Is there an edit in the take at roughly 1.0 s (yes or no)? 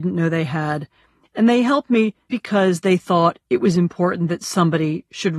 no